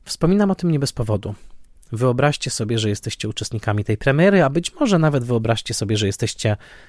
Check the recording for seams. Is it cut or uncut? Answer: uncut